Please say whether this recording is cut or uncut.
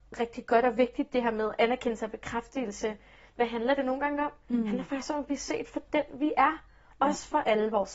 uncut